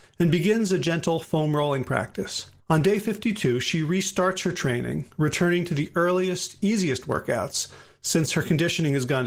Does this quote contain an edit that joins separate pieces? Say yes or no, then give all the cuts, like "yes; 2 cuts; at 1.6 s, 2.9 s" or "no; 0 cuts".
yes; 1 cut; at 2.6 s